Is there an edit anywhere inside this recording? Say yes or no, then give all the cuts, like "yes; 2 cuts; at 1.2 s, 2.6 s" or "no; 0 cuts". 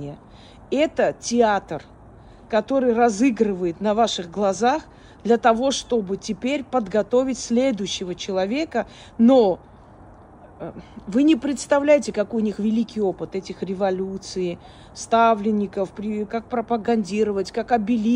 yes; 1 cut; at 16.3 s